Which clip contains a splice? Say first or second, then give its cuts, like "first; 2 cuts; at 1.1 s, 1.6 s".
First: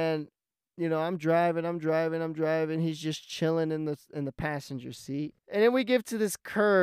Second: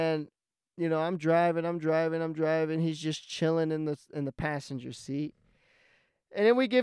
first; 1 cut; at 5.4 s